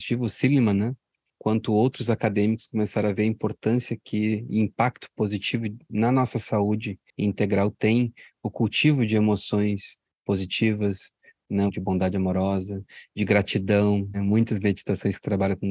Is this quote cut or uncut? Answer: cut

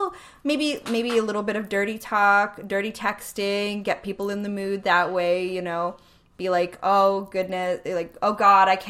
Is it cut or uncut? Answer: uncut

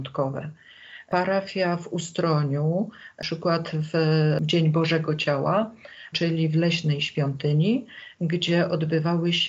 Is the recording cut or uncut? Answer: cut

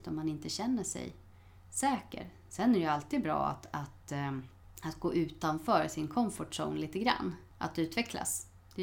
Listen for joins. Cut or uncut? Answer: uncut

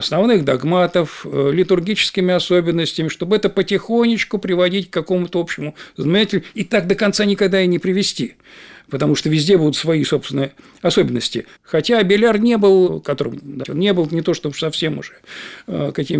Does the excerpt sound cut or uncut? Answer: cut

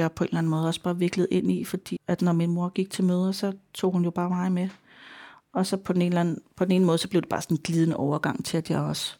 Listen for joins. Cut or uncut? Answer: cut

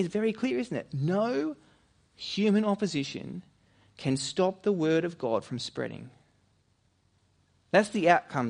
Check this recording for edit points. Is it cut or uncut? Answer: uncut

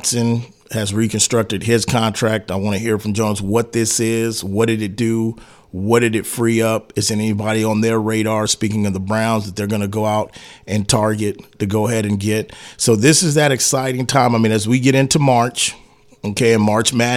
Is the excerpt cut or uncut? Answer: uncut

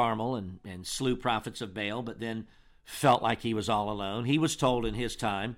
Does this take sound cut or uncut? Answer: uncut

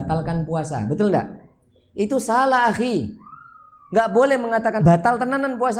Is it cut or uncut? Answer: cut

